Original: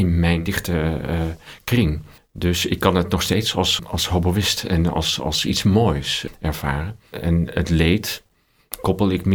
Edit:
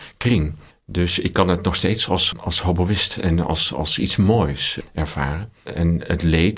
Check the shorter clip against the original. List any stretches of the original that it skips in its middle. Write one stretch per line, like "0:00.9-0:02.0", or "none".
none